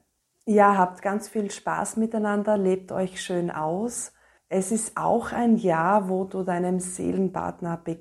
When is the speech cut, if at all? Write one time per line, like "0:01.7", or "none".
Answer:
0:04.4